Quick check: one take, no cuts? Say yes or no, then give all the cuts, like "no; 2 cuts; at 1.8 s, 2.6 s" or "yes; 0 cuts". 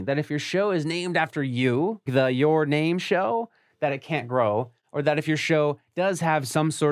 no; 1 cut; at 2.1 s